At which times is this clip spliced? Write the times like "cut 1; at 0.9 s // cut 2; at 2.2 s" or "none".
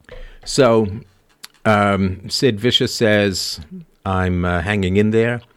none